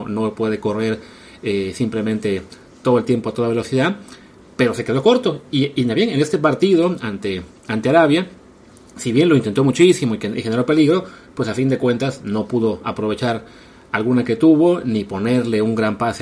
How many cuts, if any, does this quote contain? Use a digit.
0